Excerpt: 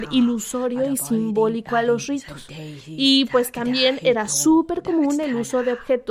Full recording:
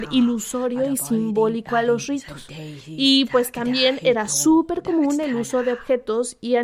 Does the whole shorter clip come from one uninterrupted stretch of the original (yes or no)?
yes